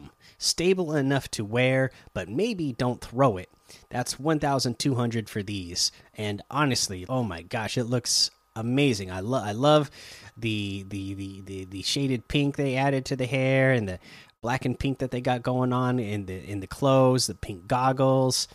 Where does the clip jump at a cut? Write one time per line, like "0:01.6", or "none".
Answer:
0:07.1